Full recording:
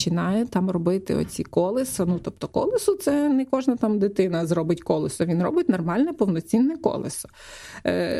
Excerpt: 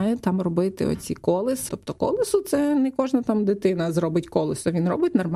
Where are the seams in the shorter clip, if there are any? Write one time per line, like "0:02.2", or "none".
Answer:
0:01.7